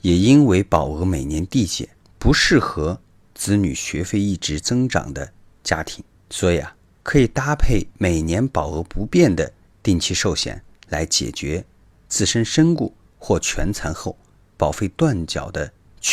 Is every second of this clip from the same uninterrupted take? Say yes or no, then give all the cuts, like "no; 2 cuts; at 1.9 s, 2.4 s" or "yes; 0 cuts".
yes; 0 cuts